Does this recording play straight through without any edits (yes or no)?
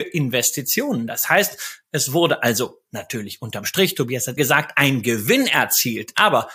no